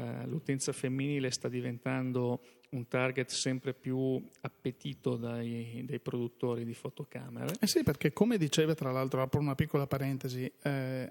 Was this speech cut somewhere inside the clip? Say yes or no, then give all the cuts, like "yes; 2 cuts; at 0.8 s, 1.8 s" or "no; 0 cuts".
no; 0 cuts